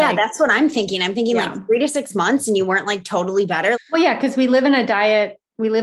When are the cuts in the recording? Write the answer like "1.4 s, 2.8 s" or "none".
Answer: 3.7 s